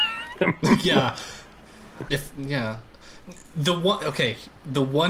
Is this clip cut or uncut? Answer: cut